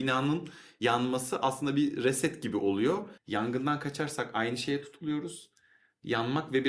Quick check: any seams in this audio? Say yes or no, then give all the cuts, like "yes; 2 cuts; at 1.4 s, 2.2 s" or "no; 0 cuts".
yes; 1 cut; at 3.2 s